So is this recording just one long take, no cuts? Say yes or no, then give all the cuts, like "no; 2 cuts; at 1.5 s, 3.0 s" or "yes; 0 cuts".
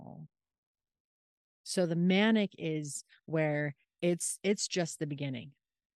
yes; 0 cuts